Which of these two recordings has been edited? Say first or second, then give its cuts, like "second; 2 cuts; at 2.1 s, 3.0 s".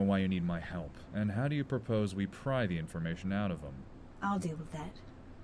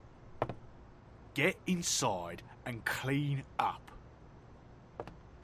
first; 1 cut; at 1.1 s